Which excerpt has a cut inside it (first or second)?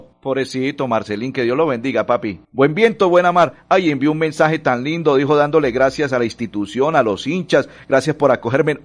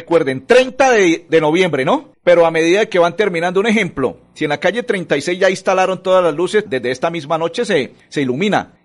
second